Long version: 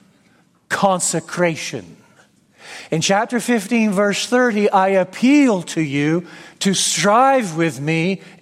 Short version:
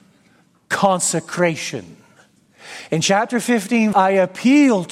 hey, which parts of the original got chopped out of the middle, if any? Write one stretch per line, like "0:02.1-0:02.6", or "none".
0:03.9-0:04.7